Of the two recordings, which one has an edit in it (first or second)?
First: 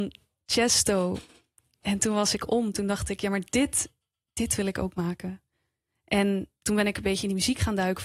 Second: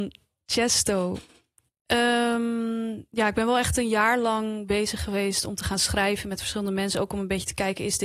second